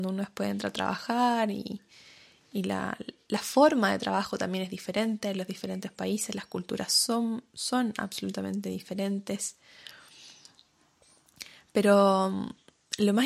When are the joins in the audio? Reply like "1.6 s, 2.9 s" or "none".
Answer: none